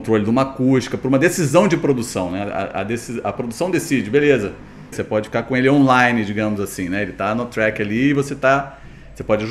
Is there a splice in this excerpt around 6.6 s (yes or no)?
no